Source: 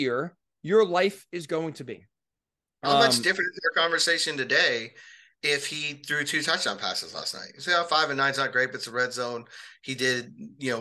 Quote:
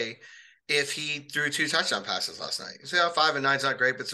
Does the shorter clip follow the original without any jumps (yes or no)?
yes